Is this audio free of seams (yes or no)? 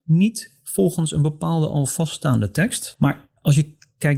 no